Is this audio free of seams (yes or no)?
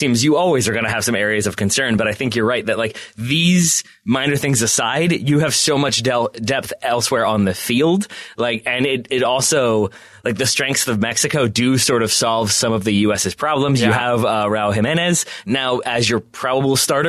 yes